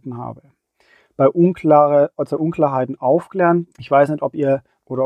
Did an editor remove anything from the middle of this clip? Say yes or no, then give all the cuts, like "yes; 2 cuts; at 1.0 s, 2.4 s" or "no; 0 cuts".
yes; 1 cut; at 3.7 s